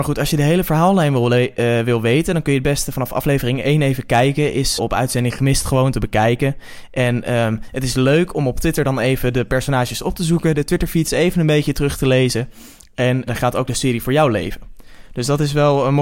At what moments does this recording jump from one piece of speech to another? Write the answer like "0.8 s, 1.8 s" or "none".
4.8 s, 13.3 s